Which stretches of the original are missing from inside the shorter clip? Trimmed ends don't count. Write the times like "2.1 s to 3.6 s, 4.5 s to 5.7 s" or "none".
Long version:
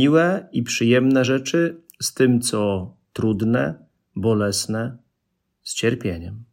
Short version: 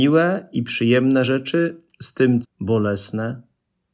2.4 s to 4.0 s